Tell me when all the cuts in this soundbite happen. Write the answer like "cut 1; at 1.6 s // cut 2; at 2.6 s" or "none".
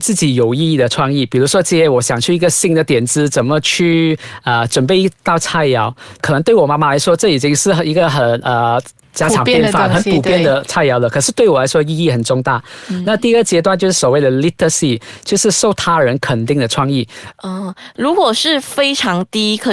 cut 1; at 17.3 s

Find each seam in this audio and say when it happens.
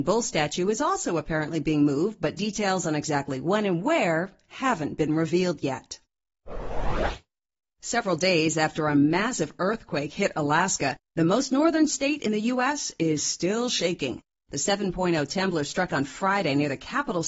none

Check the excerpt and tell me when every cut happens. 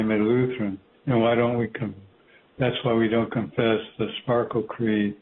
cut 1; at 0.9 s

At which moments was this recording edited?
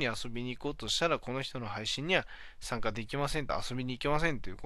none

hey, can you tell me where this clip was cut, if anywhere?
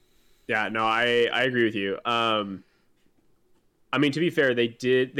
none

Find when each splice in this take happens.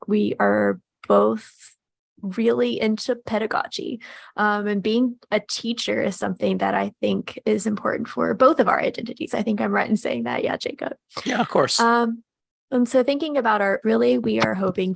cut 1; at 13.8 s

